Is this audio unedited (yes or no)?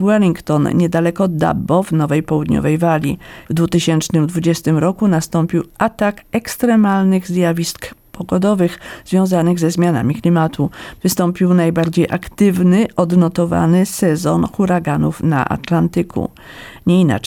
no